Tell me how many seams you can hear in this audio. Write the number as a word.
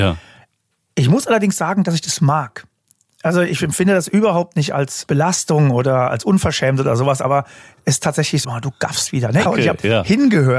two